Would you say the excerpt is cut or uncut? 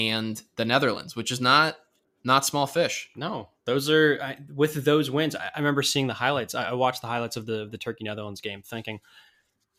uncut